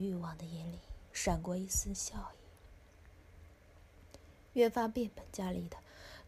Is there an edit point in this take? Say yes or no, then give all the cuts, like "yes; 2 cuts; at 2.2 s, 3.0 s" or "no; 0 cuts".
no; 0 cuts